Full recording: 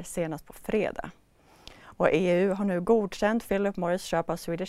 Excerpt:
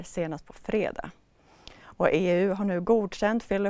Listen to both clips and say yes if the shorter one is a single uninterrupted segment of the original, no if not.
yes